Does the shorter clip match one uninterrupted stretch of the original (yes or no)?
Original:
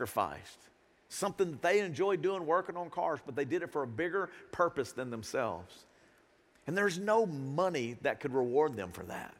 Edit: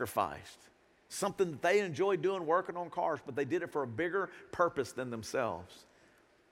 yes